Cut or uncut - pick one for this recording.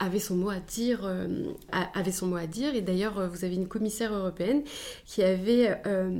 uncut